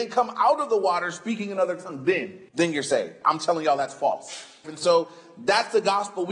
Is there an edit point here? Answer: yes; 2 cuts; at 2.5 s, 4.6 s

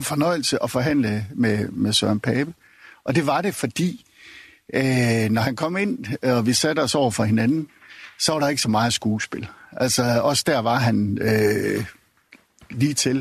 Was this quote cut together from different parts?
no; 0 cuts

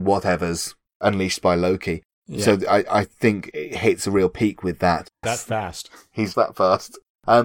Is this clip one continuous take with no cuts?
no; 3 cuts; at 3.5 s, 5.2 s, 6.3 s

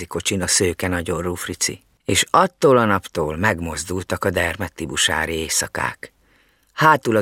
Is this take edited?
no; 0 cuts

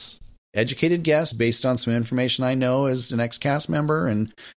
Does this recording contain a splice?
yes; 1 cut; at 1.3 s

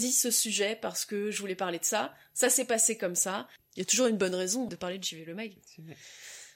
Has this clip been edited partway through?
yes; 2 cuts; at 3.6 s, 4.7 s

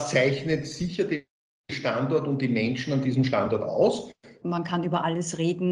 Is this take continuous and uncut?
no; 1 cut; at 4.4 s

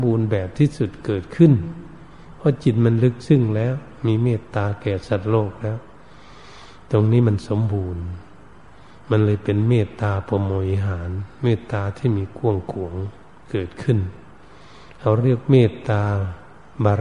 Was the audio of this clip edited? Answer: no; 0 cuts

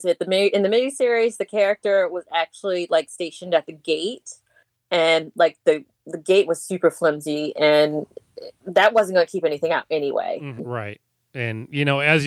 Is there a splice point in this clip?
yes; 1 cut; at 10.6 s

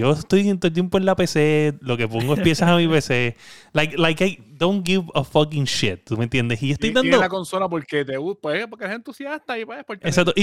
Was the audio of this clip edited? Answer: no; 0 cuts

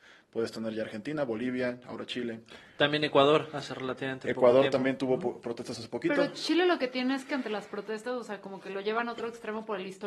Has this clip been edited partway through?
no; 0 cuts

